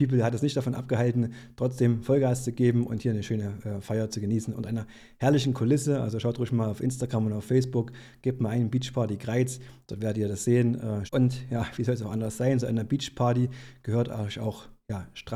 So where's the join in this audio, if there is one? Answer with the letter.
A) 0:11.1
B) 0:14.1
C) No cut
A